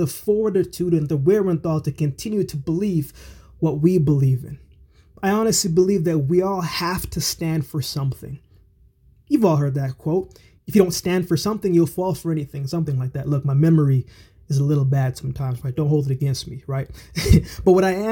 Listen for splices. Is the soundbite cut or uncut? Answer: uncut